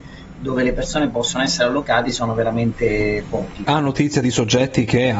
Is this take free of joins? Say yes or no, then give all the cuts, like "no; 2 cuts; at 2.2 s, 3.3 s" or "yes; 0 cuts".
no; 1 cut; at 3.7 s